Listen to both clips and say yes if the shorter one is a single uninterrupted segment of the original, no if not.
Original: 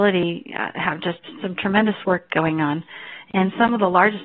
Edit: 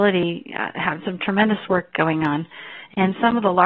no